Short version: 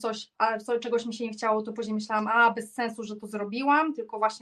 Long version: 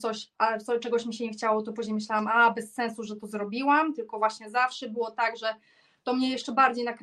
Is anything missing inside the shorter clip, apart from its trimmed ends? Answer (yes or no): no